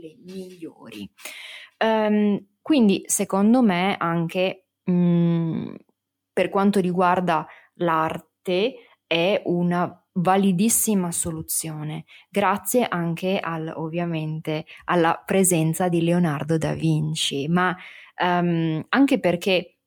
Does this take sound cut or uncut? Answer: uncut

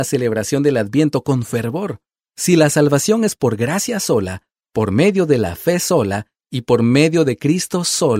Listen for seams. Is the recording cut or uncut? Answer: uncut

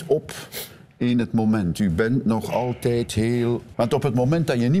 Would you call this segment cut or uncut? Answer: cut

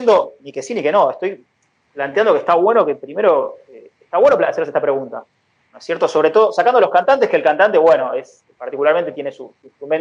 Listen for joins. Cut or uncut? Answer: cut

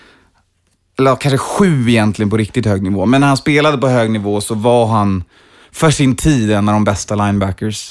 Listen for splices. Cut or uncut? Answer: uncut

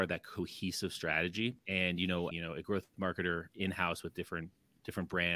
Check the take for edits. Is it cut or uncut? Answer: cut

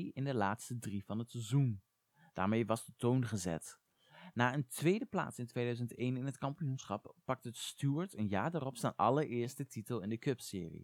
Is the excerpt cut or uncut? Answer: uncut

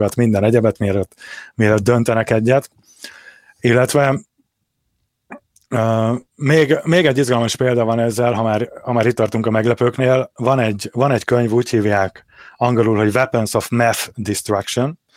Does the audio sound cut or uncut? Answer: uncut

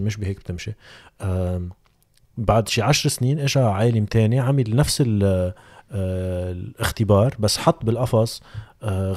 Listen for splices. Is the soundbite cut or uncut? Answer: uncut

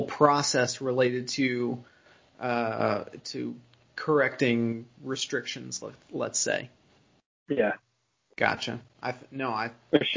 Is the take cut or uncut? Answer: cut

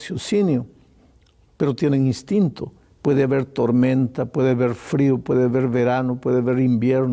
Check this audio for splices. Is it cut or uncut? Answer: cut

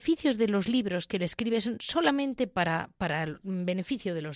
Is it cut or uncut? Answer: uncut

